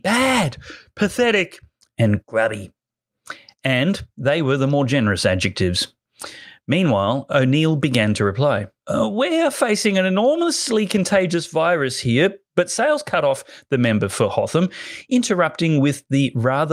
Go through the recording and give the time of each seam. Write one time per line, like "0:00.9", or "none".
0:08.8